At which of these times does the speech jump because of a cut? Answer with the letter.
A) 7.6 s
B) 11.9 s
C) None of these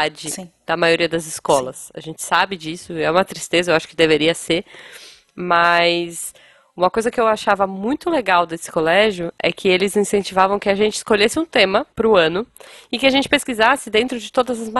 B